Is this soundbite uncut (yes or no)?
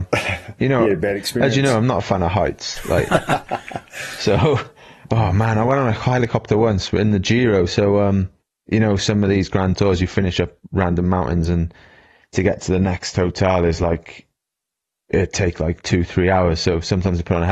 yes